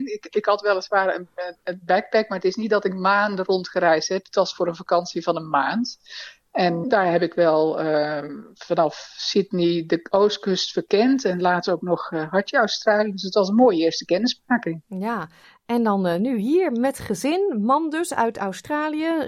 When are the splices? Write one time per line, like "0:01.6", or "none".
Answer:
0:06.8